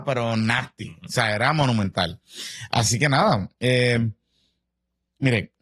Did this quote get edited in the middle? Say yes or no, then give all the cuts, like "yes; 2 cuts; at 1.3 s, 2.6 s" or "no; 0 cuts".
no; 0 cuts